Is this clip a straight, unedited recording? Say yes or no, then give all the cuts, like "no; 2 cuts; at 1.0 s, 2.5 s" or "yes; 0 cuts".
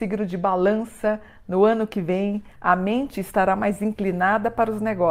no; 1 cut; at 2.5 s